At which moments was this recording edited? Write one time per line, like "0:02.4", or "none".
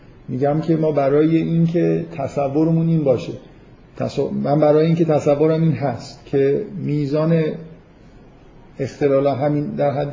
0:06.2